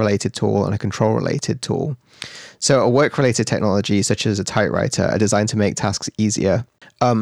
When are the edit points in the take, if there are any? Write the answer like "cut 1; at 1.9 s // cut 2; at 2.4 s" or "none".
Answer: none